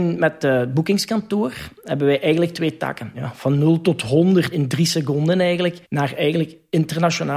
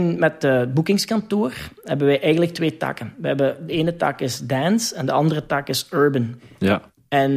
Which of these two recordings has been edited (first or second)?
first